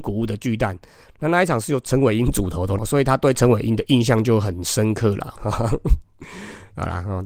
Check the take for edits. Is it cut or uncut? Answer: cut